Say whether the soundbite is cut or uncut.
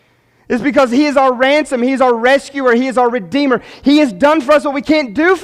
uncut